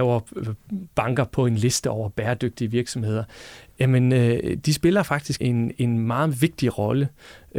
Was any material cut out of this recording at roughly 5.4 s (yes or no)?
yes